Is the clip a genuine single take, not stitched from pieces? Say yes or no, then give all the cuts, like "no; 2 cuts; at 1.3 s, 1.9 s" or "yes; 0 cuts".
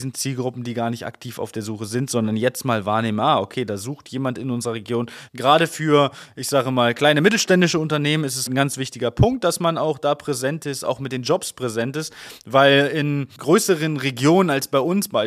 no; 2 cuts; at 5.3 s, 8.5 s